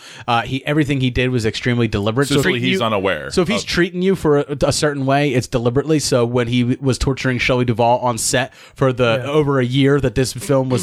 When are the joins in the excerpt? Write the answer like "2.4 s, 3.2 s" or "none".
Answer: 2.4 s